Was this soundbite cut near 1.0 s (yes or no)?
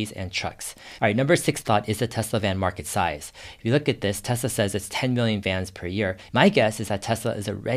yes